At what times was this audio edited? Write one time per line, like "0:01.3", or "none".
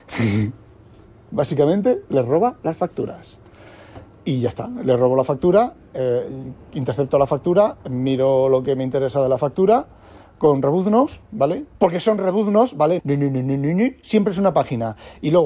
0:11.7
0:13.0